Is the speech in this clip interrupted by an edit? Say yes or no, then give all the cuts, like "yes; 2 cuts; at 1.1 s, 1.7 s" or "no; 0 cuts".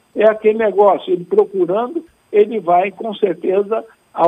no; 0 cuts